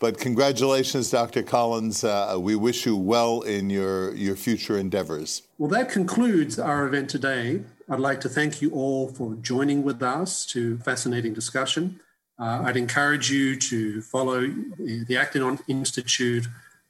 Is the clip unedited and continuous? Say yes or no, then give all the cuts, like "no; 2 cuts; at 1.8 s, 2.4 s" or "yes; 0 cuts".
no; 2 cuts; at 5.5 s, 10.8 s